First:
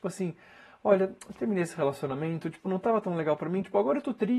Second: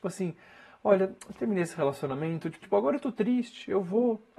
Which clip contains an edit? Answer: second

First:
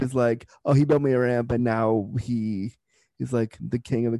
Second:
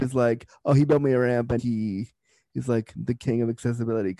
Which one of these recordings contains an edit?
second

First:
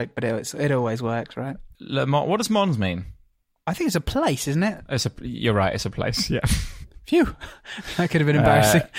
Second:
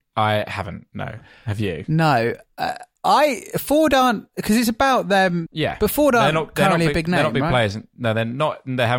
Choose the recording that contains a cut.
second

